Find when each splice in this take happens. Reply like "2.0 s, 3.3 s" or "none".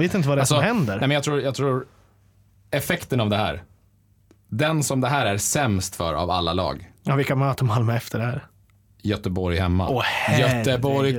none